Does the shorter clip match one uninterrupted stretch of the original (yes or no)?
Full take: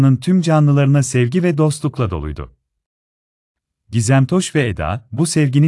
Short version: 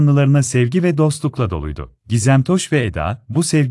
no